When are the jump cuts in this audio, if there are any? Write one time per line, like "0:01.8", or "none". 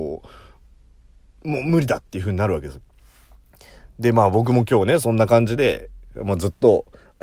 none